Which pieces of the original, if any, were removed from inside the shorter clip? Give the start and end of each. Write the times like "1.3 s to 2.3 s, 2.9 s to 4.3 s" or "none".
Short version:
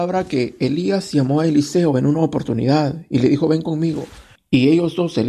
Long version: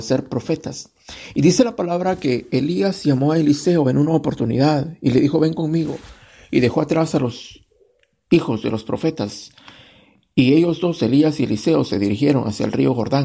6.3 s to 10.2 s